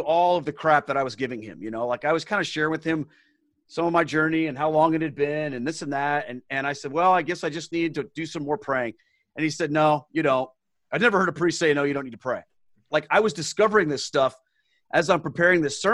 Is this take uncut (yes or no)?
no